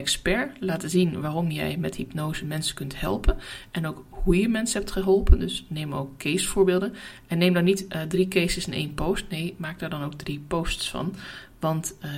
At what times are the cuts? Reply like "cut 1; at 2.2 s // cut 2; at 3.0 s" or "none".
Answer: none